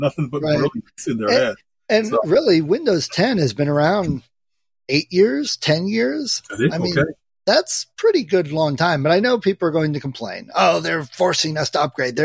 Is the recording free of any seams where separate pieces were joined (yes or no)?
yes